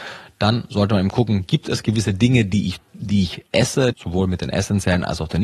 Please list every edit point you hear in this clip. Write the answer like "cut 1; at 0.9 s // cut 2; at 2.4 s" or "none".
cut 1; at 3.9 s